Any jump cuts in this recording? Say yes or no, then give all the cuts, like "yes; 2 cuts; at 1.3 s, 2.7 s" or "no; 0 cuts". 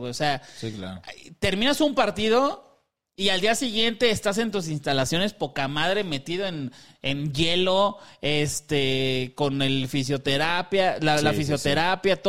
no; 0 cuts